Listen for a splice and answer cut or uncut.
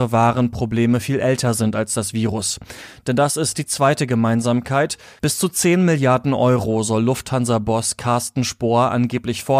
cut